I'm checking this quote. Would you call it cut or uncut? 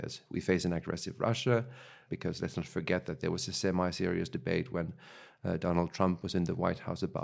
cut